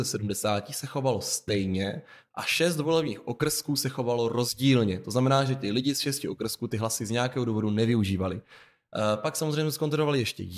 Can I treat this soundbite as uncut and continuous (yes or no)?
yes